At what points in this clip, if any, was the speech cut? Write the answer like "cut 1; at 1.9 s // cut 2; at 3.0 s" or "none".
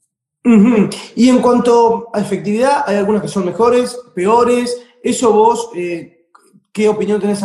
none